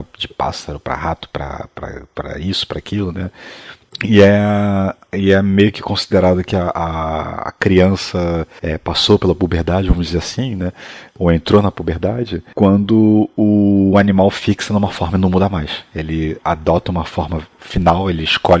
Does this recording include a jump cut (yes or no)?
no